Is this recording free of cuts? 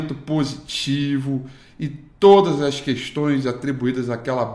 yes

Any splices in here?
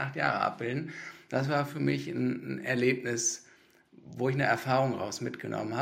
no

